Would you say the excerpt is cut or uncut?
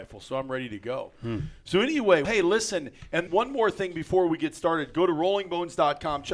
cut